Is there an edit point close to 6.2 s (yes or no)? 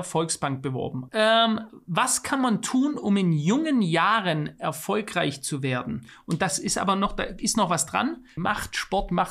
no